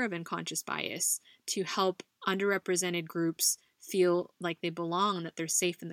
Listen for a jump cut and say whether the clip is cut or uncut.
uncut